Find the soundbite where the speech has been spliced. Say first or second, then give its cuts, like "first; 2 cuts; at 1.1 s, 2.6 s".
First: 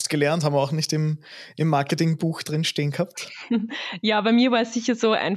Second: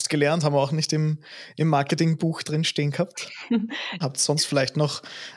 second; 1 cut; at 4.0 s